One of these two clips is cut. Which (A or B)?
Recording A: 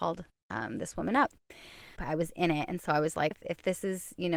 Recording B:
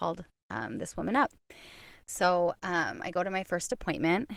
A